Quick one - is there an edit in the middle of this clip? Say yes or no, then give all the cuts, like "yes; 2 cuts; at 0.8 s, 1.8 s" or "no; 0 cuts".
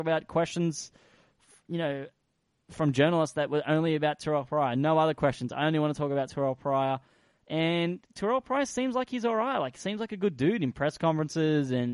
no; 0 cuts